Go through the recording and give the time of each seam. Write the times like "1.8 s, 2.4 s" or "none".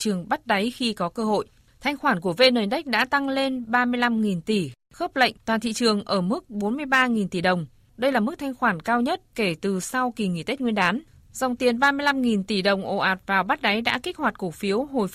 none